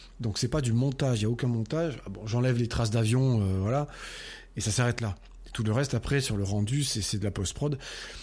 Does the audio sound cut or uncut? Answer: uncut